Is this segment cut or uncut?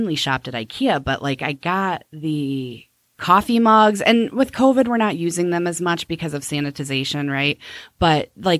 uncut